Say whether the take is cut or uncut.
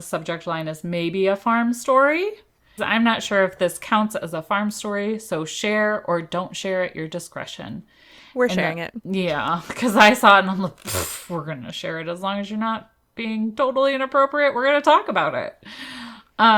cut